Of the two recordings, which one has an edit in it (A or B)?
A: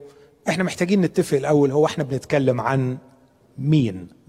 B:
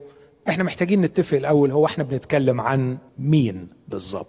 B